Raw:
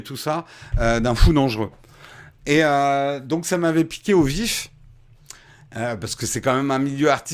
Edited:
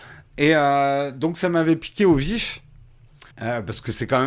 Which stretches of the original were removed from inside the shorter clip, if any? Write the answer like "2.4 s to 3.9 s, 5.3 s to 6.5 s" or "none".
5.4 s to 5.6 s